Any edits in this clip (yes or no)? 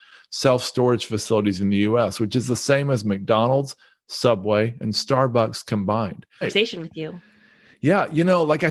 yes